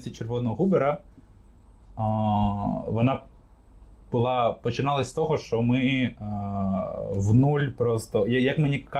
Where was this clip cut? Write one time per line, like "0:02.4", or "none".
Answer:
none